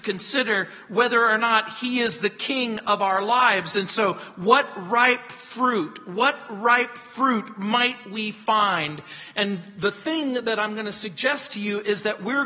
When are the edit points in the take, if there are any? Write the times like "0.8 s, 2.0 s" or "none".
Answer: none